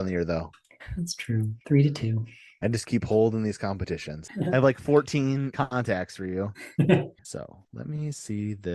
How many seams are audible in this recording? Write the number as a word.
three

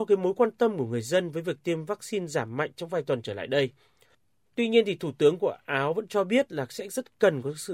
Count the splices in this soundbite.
one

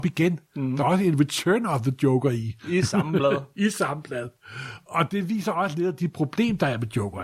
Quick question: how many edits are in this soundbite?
zero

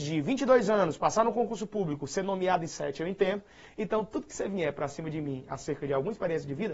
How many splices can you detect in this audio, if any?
one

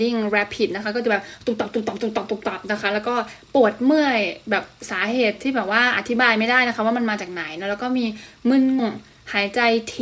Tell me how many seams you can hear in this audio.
one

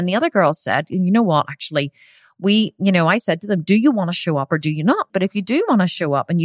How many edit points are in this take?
one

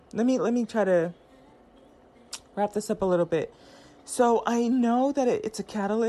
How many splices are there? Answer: zero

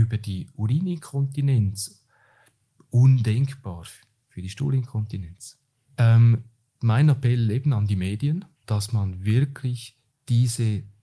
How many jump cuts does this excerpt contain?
two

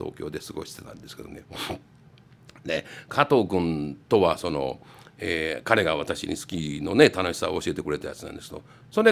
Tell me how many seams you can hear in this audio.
zero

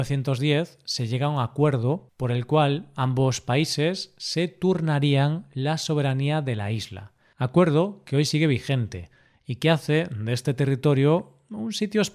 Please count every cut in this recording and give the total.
one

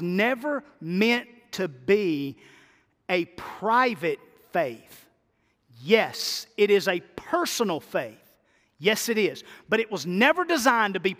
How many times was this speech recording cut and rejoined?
zero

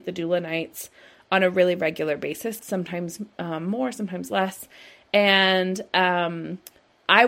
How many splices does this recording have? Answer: one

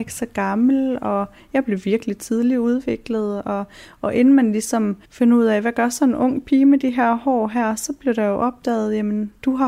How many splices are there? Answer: one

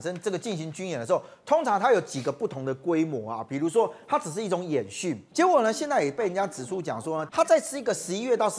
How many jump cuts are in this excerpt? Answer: two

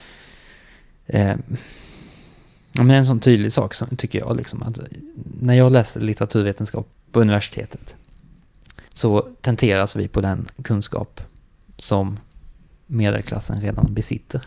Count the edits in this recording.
two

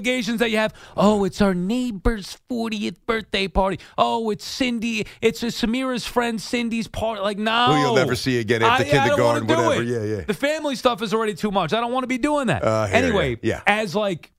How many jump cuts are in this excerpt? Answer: zero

